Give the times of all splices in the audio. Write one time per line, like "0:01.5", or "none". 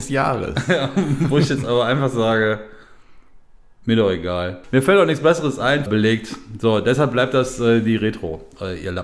0:04.6
0:05.9